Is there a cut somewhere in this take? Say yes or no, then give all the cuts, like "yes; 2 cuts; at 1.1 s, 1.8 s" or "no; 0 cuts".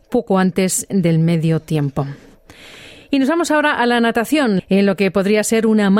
yes; 1 cut; at 4.6 s